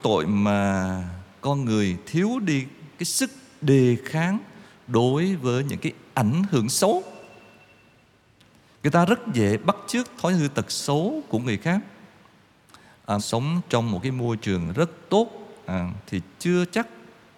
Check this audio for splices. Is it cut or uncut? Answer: cut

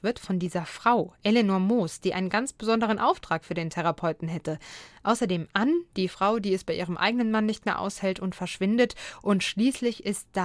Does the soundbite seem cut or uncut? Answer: uncut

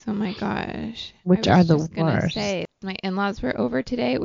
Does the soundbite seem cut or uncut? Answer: uncut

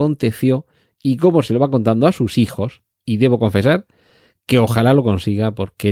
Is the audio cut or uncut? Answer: cut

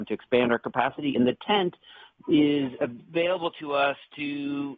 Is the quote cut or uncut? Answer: uncut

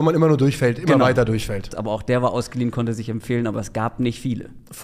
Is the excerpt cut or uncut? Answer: cut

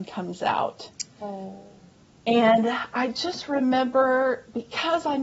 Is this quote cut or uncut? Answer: uncut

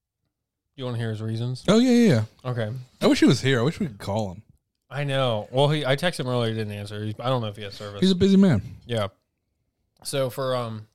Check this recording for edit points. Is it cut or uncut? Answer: uncut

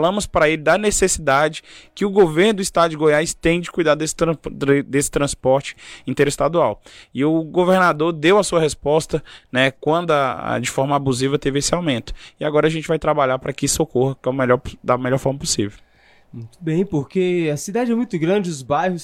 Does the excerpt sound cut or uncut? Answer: uncut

